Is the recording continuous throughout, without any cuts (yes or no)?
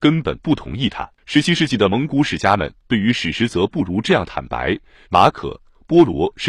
no